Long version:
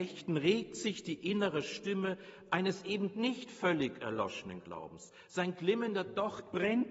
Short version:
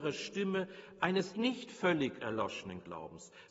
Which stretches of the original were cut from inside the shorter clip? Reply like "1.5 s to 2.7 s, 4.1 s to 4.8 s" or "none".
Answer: 2.8 s to 3.1 s